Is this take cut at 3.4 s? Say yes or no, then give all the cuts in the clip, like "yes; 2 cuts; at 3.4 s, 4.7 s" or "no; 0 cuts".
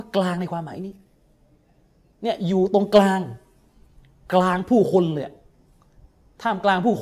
no; 0 cuts